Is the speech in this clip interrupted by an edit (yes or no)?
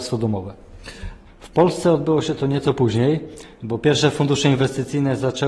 yes